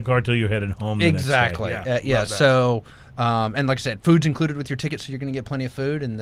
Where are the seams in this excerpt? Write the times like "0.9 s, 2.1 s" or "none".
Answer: none